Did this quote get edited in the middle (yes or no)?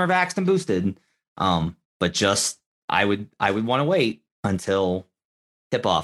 no